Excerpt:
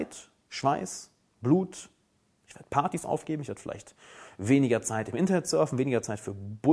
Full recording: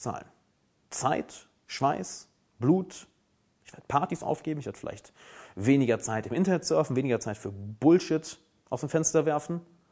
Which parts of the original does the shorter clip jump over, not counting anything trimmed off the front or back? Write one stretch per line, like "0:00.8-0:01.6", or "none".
none